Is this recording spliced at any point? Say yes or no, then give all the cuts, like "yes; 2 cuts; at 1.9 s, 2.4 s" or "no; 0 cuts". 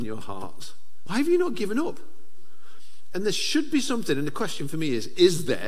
yes; 1 cut; at 1.1 s